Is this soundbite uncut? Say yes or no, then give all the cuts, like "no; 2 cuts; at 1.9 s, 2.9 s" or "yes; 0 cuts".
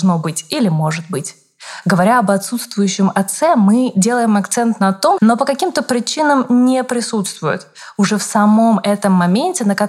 no; 1 cut; at 5.2 s